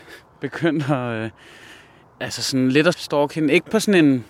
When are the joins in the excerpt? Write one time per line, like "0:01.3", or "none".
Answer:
0:02.9